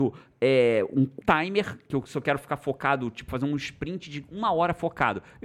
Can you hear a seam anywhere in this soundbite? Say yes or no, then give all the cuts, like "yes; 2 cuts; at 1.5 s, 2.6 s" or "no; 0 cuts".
yes; 1 cut; at 1.2 s